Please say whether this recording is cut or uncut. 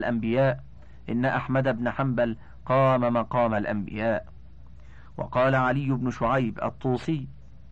uncut